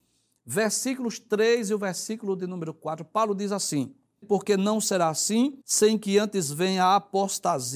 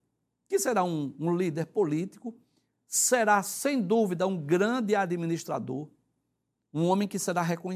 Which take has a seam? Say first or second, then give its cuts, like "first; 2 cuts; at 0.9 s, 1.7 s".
first; 2 cuts; at 4.2 s, 5.6 s